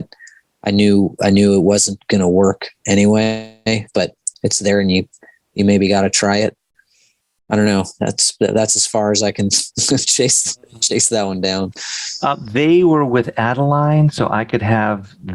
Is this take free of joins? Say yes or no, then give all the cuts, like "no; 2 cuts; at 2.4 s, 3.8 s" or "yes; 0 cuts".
yes; 0 cuts